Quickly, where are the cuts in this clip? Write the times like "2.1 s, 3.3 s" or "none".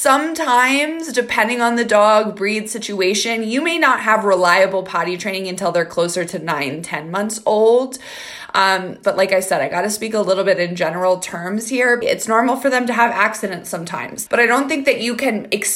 9.0 s, 12.0 s, 14.3 s